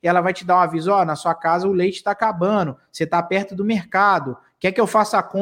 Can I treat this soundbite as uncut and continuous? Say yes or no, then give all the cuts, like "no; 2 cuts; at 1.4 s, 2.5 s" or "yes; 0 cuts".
yes; 0 cuts